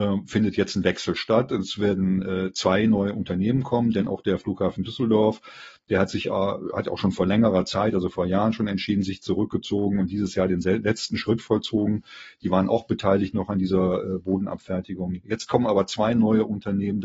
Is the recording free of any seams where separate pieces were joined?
yes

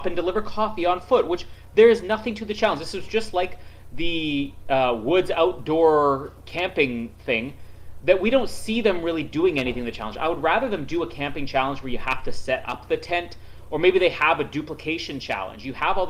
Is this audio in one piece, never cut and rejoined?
yes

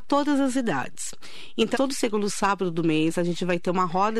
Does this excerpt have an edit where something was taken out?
yes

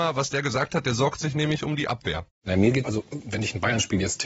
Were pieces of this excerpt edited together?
yes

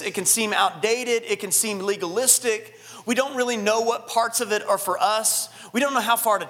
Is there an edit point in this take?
no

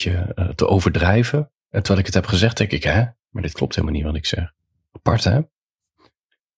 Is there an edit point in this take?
no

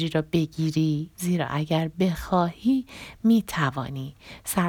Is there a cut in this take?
yes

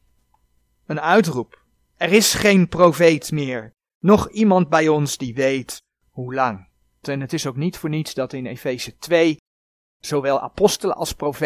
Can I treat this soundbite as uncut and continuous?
no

